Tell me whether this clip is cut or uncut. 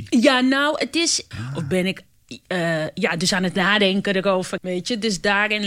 cut